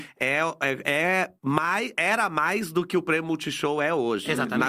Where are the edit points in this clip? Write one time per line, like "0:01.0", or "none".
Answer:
0:01.4